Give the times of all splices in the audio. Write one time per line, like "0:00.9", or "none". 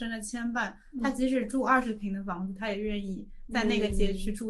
none